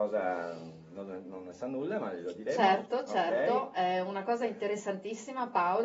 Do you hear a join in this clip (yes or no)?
no